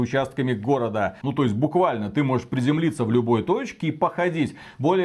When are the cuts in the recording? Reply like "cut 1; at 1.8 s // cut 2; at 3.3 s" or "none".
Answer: cut 1; at 1.2 s